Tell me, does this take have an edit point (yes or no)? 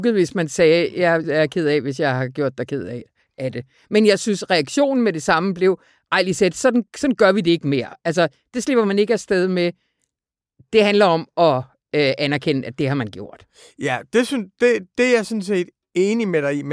yes